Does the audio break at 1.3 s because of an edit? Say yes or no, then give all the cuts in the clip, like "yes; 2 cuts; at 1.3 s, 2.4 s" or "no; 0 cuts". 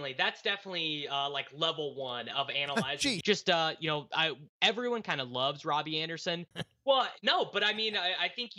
no; 2 cuts; at 3.2 s, 6.5 s